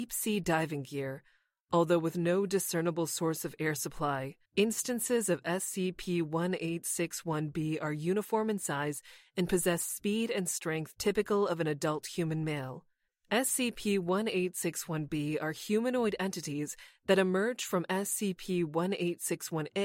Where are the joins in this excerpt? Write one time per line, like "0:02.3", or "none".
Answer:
0:04.4
0:13.1